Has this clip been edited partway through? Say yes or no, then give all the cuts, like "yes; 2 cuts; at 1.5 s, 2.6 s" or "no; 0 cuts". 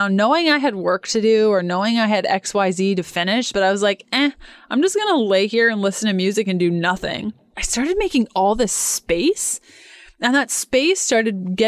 no; 0 cuts